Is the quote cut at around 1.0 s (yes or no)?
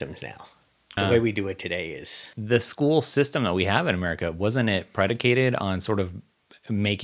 yes